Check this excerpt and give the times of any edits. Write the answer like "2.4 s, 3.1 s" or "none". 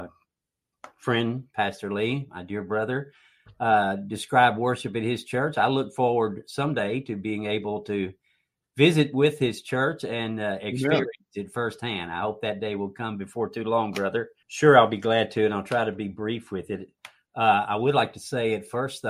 14.4 s